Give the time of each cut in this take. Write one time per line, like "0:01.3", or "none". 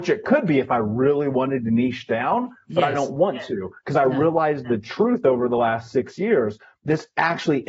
none